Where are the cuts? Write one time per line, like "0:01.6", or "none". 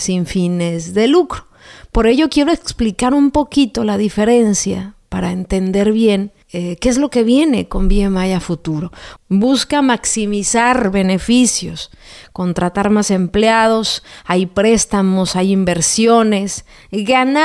0:06.4
0:09.2